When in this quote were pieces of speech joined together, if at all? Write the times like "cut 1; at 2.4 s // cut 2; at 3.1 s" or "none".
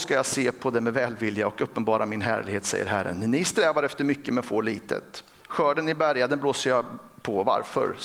none